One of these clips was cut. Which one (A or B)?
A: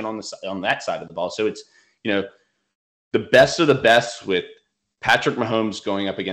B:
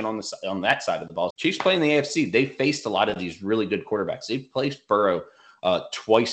B